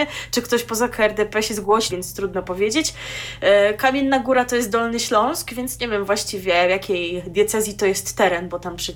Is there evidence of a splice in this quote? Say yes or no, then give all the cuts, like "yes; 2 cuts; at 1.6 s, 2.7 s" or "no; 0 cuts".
yes; 1 cut; at 1.9 s